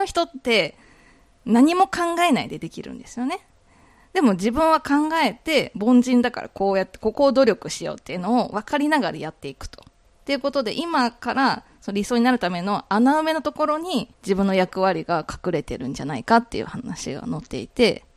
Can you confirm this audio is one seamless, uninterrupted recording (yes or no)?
no